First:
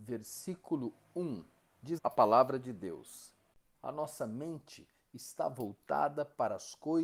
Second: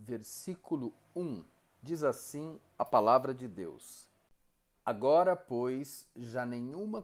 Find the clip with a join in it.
first; 2 cuts; at 2.0 s, 3.7 s

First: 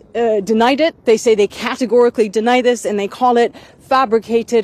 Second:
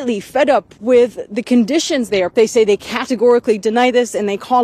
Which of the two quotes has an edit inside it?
second; 1 cut; at 2.3 s

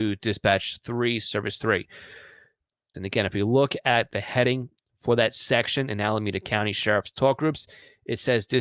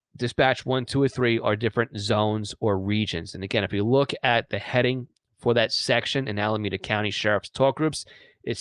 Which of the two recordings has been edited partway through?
first; 1 cut; at 2.9 s

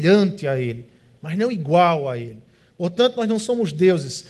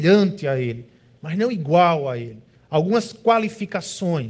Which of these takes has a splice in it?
second; 1 cut; at 2.6 s

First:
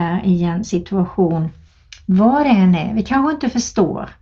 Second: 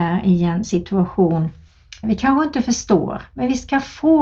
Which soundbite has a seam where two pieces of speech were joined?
second; 1 cut; at 2.0 s

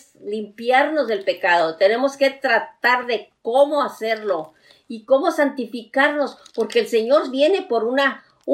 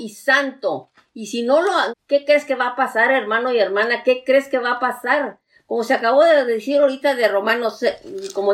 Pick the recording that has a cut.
second; 2 cuts; at 1.9 s, 5.6 s

